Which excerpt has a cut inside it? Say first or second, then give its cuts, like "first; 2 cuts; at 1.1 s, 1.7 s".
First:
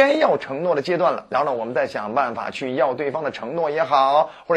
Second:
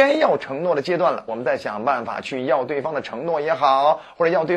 second; 1 cut; at 1.3 s